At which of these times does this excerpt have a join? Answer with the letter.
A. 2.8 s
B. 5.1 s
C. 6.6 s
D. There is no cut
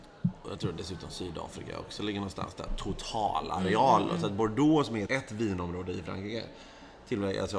B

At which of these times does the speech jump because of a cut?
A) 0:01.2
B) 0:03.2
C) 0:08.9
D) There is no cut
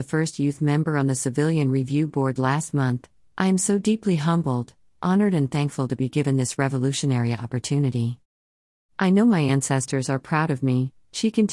B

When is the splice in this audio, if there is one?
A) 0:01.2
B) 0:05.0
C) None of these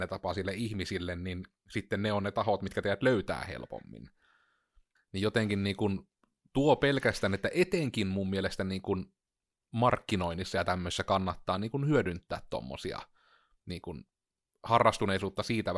B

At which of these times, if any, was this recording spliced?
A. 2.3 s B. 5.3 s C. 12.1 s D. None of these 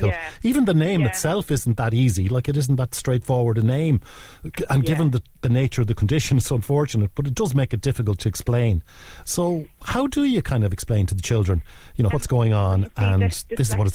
C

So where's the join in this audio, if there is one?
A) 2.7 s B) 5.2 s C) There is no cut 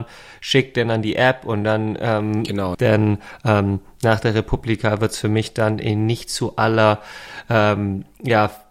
A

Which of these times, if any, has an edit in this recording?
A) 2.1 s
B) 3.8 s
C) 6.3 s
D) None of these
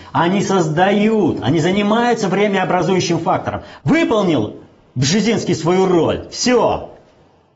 B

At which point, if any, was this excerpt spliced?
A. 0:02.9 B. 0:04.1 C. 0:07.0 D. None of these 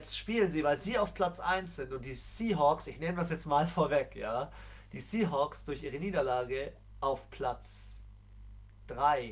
D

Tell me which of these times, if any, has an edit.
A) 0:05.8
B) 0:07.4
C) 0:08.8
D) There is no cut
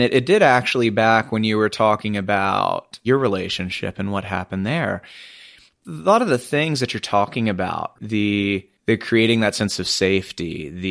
C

